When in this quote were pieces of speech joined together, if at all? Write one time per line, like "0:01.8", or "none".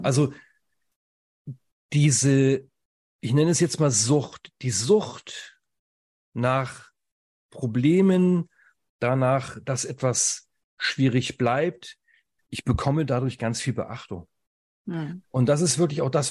0:12.4